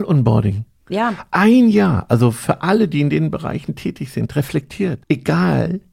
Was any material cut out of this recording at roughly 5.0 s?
yes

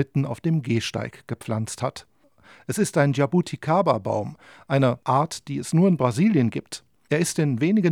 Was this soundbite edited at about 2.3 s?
no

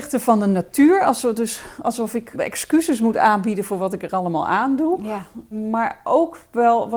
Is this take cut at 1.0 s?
no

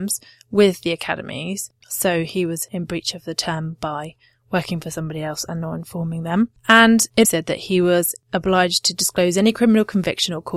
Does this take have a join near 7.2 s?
yes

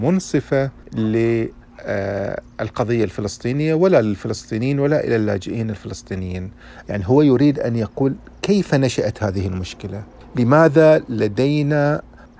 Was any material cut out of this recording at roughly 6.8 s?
yes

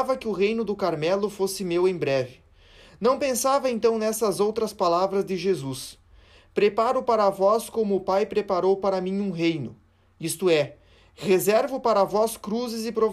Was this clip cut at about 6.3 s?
no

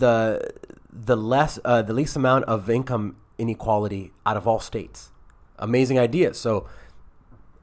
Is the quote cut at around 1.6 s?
no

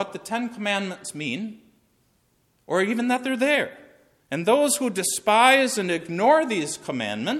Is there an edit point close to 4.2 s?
yes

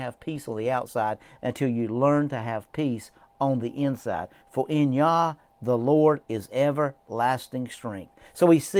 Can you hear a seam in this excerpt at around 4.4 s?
yes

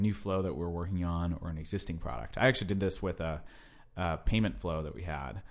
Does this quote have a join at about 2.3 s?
no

